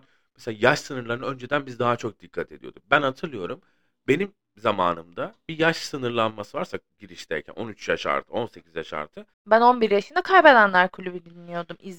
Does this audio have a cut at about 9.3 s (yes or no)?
yes